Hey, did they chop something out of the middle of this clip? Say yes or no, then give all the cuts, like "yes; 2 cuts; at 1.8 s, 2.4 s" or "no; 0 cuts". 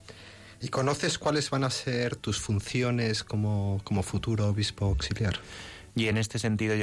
yes; 1 cut; at 5.9 s